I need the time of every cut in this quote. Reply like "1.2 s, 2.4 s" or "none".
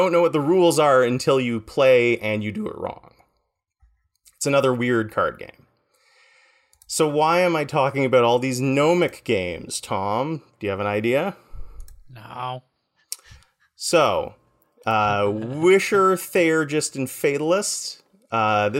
none